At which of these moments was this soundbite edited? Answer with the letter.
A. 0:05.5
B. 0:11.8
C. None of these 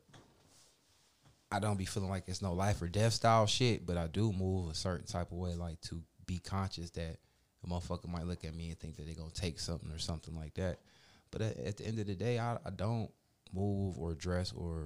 C